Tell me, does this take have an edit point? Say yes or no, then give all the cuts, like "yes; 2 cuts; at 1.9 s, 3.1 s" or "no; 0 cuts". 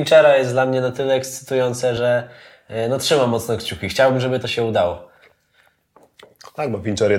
no; 0 cuts